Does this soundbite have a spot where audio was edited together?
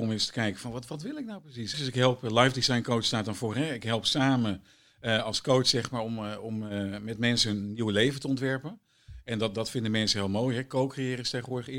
yes; 1 cut; at 1.7 s

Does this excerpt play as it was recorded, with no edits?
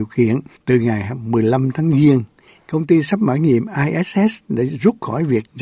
yes; 0 cuts

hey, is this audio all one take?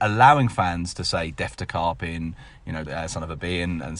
no; 1 cut; at 2.9 s

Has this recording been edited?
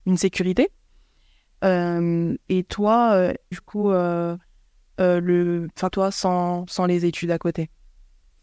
yes; 2 cuts; at 3.5 s, 5.9 s

